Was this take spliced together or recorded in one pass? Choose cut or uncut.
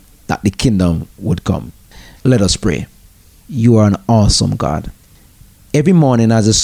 cut